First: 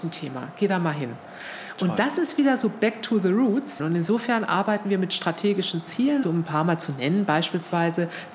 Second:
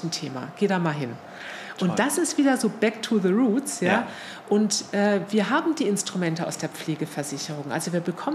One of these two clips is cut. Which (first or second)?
first